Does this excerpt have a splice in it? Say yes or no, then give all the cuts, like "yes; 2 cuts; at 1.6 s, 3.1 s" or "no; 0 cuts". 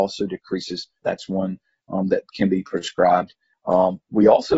yes; 2 cuts; at 1.0 s, 3.5 s